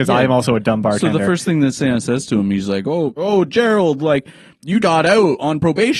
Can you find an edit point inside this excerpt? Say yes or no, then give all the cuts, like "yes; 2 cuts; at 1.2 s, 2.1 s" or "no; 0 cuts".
yes; 2 cuts; at 3.2 s, 4.8 s